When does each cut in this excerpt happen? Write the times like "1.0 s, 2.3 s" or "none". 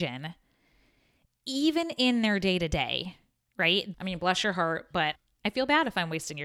3.9 s, 5.1 s